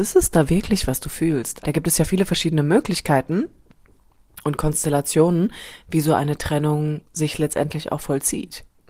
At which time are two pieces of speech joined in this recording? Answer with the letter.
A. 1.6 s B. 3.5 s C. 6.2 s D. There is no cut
A